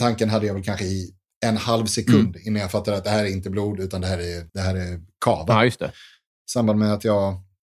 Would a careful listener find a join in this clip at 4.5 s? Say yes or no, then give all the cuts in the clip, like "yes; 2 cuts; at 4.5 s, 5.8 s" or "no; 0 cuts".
yes; 2 cuts; at 4.5 s, 6.4 s